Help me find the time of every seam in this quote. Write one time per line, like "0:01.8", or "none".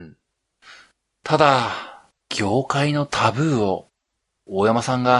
0:02.2